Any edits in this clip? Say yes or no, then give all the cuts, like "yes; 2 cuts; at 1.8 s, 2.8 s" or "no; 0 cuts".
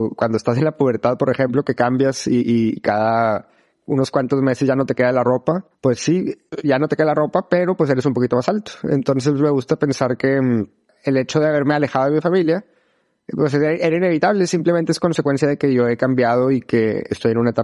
no; 0 cuts